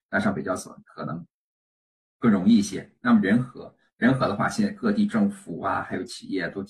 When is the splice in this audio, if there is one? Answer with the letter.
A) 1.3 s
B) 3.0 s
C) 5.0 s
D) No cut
D